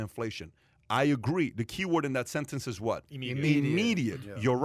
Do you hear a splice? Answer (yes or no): no